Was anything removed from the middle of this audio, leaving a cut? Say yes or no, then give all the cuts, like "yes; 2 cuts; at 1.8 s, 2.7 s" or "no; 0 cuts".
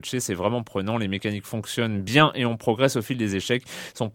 no; 0 cuts